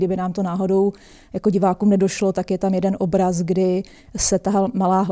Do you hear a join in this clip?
no; 0 cuts

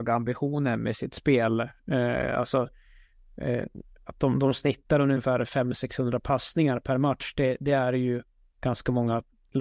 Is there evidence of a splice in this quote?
no; 0 cuts

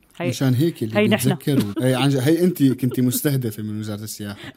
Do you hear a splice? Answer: yes; 1 cut; at 1.7 s

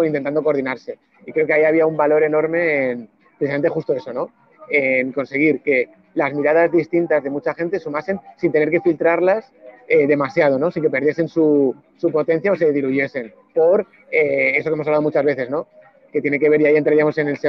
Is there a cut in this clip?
no; 0 cuts

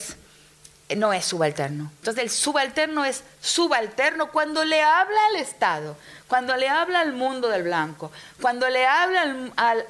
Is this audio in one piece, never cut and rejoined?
no; 1 cut; at 2.0 s

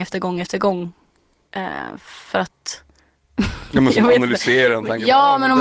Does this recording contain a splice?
no; 0 cuts

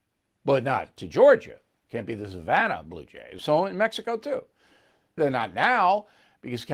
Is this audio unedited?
no; 2 cuts; at 3.4 s, 5.2 s

